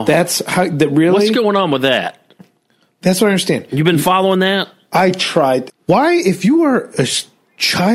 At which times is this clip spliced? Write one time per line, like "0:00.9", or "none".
0:05.7